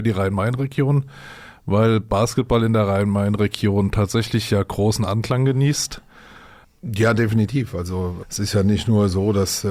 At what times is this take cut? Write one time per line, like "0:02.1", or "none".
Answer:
0:06.6
0:08.2